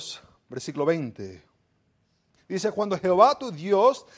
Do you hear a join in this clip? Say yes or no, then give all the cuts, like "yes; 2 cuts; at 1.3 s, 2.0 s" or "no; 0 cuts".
yes; 1 cut; at 2.4 s